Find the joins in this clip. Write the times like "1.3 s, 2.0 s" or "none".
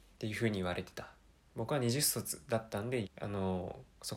1.5 s, 3.0 s